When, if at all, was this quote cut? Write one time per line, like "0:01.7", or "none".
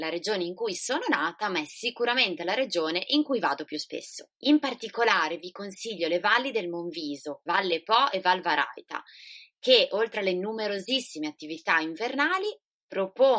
0:04.4
0:07.5